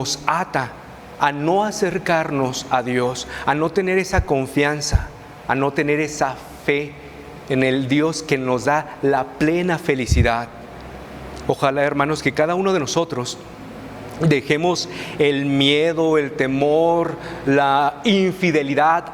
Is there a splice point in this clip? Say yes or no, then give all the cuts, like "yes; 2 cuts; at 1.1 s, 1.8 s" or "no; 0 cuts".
no; 0 cuts